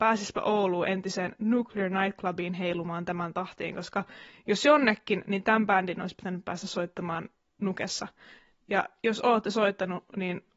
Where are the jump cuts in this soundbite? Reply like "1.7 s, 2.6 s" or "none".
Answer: none